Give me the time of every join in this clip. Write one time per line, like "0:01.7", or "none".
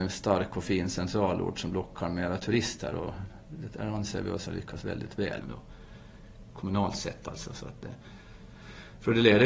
0:05.4